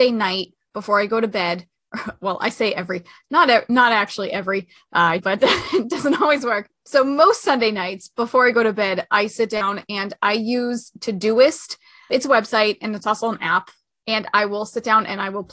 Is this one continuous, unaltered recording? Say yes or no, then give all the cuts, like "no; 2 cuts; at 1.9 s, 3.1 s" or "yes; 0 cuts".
no; 1 cut; at 5.2 s